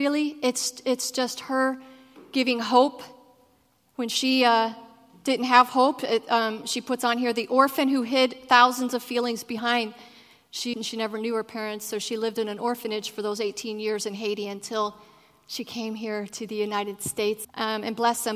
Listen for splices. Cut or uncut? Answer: cut